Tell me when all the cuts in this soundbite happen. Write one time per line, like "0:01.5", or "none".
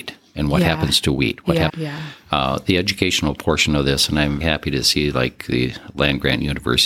0:01.7
0:04.4